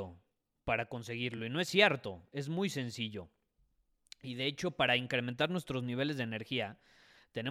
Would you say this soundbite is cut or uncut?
uncut